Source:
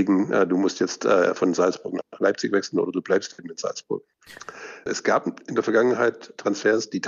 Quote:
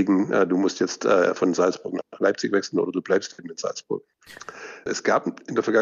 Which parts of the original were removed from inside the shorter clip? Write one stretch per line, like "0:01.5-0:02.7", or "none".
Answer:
none